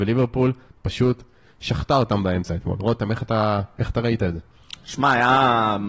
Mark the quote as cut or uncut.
uncut